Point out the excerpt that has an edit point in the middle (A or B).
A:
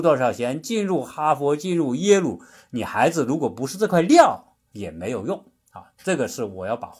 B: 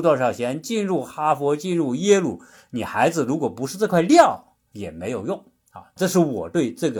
B